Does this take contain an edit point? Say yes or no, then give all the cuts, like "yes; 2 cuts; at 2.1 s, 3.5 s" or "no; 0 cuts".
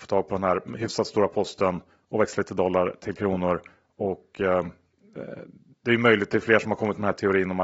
no; 0 cuts